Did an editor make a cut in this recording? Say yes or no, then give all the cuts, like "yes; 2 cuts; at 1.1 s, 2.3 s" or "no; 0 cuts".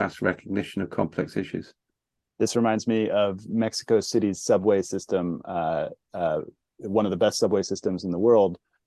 no; 0 cuts